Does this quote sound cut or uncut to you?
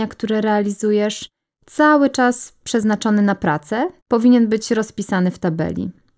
cut